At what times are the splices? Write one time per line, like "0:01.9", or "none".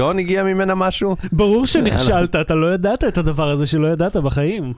none